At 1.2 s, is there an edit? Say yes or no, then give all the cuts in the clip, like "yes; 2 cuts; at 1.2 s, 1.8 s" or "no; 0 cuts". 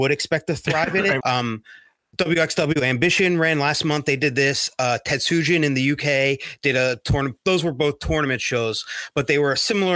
yes; 1 cut; at 1.2 s